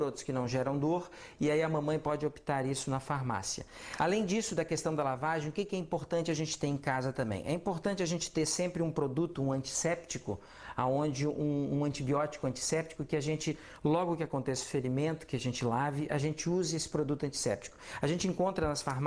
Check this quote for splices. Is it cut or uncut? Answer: cut